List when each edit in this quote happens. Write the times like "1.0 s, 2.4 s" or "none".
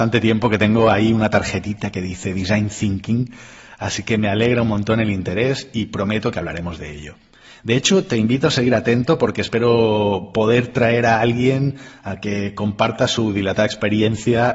none